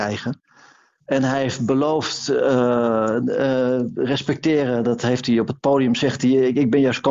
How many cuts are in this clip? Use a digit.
1